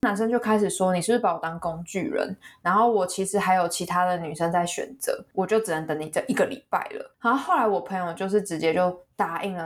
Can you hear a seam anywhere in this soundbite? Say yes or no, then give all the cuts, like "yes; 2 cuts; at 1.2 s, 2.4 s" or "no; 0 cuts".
no; 0 cuts